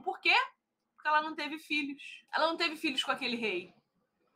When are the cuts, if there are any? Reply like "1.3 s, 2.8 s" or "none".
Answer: 2.3 s